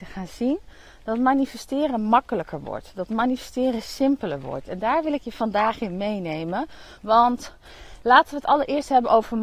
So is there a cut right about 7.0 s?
yes; 1 cut; at 7.0 s

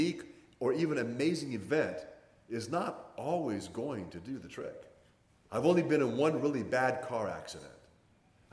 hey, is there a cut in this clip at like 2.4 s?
no; 1 cut; at 5.3 s

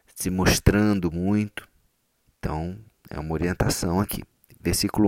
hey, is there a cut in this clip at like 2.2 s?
yes; 1 cut; at 2.2 s

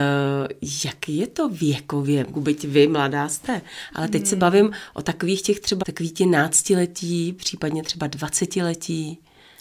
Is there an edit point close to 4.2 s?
no; 2 cuts; at 2.3 s, 5.8 s

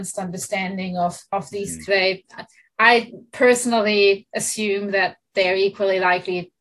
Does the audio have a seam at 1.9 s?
yes; 1 cut; at 1.9 s

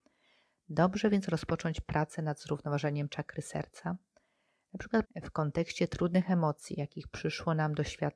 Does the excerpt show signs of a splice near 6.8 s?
no; 1 cut; at 5.0 s

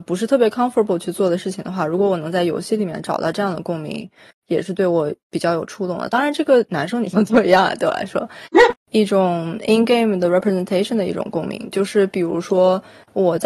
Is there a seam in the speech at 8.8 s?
yes; 1 cut; at 8.8 s

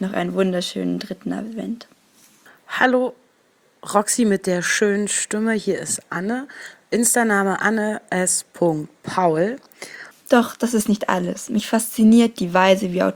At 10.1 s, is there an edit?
yes; 1 cut; at 10.1 s

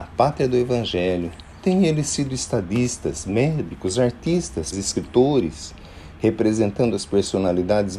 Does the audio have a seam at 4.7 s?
yes; 1 cut; at 4.7 s

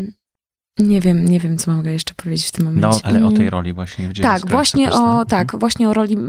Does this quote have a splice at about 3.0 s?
yes; 1 cut; at 3.0 s

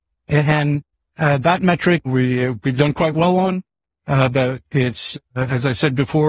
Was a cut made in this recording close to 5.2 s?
no; 1 cut; at 2.1 s

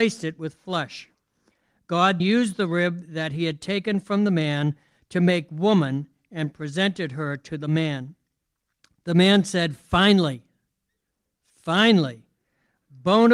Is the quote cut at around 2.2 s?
yes; 1 cut; at 2.2 s

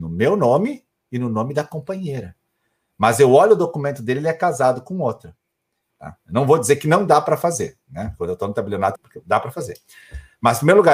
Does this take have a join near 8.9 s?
yes; 2 cuts; at 5.9 s, 8.9 s

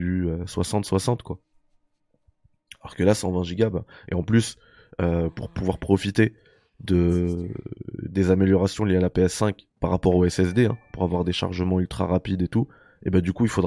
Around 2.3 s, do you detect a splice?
no; 1 cut; at 9.7 s

